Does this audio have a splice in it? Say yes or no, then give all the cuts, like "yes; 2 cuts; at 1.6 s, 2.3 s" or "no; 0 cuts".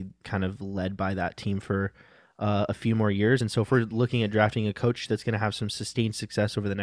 no; 0 cuts